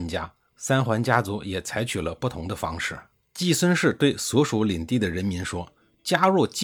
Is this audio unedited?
yes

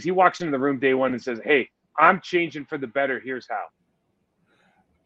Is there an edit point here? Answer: no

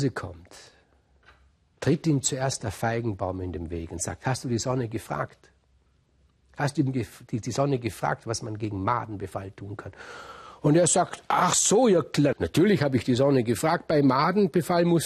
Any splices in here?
yes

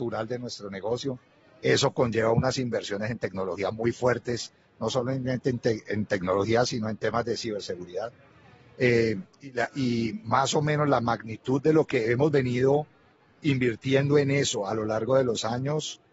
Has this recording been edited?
no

